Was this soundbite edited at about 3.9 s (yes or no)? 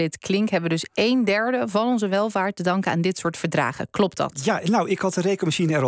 no